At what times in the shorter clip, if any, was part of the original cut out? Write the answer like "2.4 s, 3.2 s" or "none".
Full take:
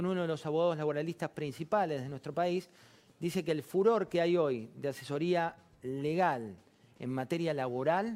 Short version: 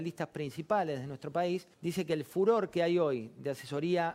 1.7 s

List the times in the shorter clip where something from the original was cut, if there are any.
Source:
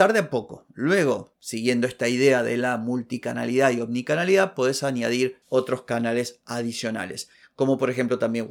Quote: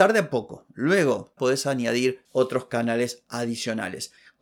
1.4 s

